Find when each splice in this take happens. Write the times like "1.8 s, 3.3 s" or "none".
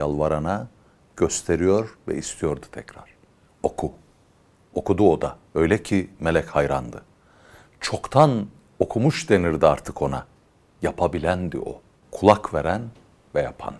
5.5 s